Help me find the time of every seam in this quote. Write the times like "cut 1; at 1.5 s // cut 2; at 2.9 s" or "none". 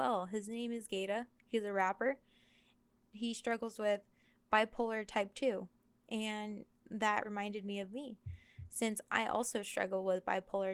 cut 1; at 7.2 s